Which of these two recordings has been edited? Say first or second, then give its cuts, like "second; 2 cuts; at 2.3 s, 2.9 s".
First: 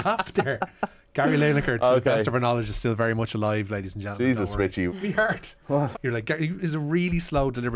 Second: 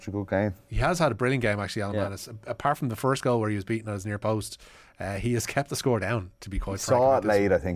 first; 2 cuts; at 4.9 s, 5.9 s